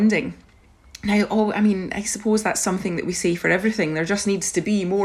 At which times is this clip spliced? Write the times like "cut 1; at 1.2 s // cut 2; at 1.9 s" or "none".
none

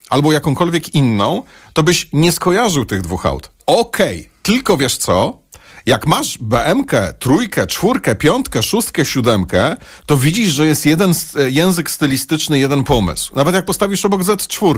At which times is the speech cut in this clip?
cut 1; at 3.6 s

